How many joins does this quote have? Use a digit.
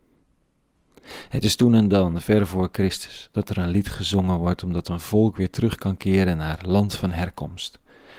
0